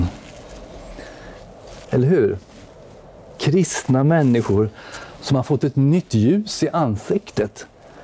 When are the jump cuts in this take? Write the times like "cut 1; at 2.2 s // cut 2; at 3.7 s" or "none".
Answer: cut 1; at 1.8 s